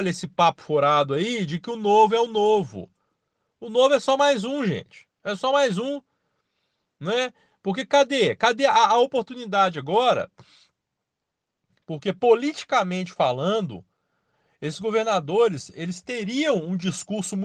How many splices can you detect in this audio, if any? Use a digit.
0